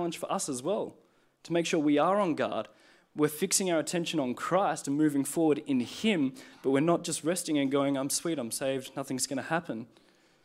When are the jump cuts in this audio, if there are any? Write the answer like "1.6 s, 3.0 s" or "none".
none